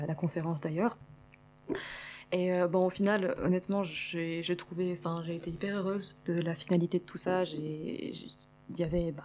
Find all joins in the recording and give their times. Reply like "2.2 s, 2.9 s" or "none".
none